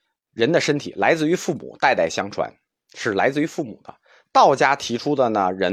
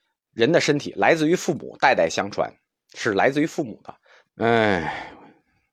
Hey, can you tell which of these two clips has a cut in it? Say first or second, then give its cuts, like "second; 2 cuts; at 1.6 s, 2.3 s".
second; 1 cut; at 4.3 s